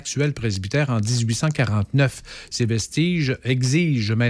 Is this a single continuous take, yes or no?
yes